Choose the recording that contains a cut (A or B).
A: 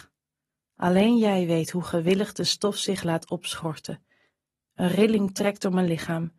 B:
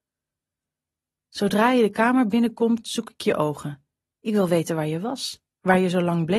A